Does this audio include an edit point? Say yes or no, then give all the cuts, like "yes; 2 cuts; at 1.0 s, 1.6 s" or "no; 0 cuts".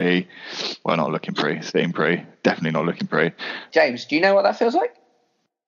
yes; 1 cut; at 3.7 s